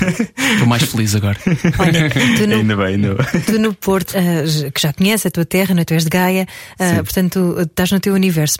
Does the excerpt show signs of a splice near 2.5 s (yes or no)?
no